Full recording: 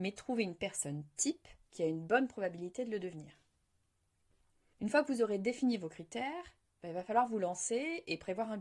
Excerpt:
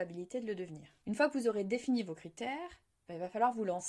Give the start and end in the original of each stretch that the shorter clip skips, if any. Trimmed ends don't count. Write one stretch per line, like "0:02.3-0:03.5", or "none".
0:03.5-0:04.8